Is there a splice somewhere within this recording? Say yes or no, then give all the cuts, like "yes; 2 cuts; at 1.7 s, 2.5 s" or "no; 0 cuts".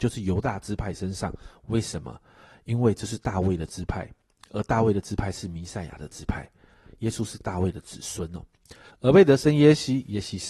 yes; 1 cut; at 8.9 s